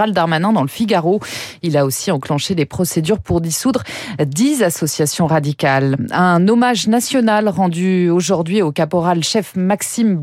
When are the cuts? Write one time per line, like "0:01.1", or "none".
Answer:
none